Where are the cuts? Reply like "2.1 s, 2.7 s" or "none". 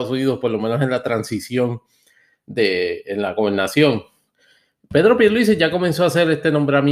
none

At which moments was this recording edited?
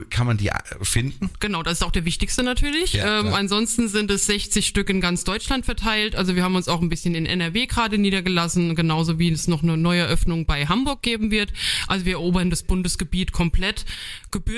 1.4 s

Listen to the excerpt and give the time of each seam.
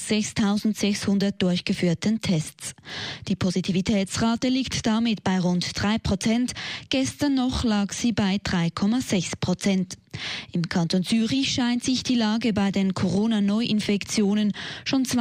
none

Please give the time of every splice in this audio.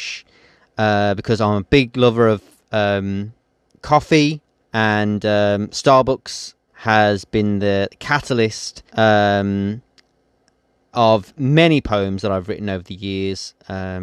4.6 s, 6.7 s, 8.9 s

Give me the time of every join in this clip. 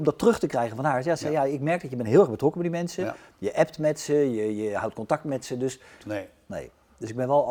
6.0 s

